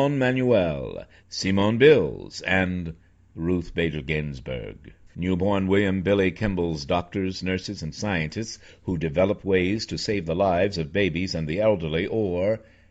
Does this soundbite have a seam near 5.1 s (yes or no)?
yes